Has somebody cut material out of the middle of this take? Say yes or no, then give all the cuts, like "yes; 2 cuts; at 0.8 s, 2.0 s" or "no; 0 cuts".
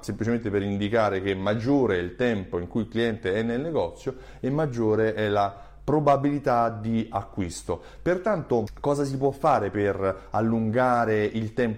no; 0 cuts